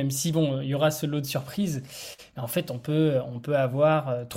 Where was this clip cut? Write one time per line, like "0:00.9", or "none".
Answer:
none